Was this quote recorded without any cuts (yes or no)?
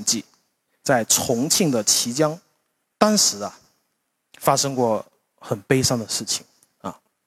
yes